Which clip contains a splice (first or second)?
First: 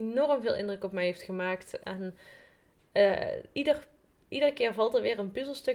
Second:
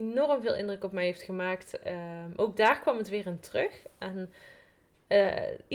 first